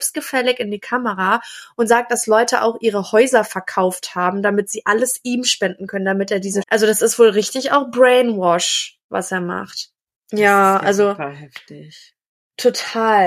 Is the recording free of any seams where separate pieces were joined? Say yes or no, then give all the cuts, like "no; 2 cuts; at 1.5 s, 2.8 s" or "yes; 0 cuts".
no; 2 cuts; at 6.6 s, 10.2 s